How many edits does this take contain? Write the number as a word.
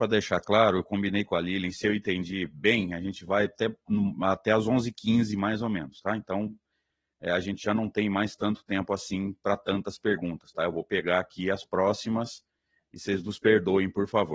zero